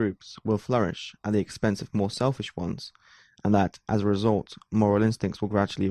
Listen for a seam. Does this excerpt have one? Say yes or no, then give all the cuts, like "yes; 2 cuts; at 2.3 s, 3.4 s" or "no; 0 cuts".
no; 0 cuts